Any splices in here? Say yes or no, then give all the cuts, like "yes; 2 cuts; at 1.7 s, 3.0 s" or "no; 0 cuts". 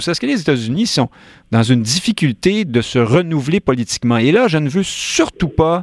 no; 0 cuts